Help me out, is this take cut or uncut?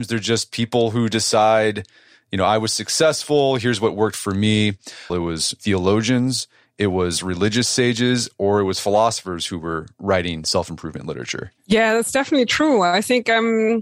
cut